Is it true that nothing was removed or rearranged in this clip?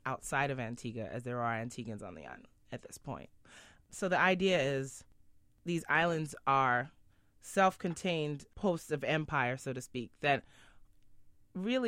yes; 0 cuts

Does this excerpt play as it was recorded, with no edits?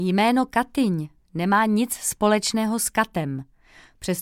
yes; 0 cuts

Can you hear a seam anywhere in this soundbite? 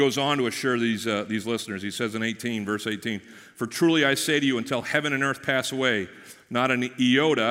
no; 0 cuts

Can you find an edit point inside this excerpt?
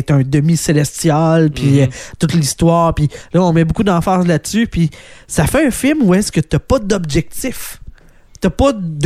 no; 0 cuts

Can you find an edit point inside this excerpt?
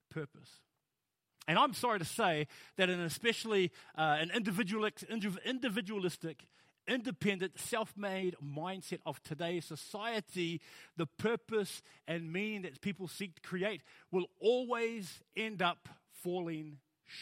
no; 0 cuts

